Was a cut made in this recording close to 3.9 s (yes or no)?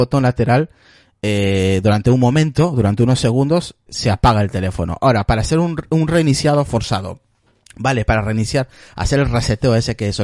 yes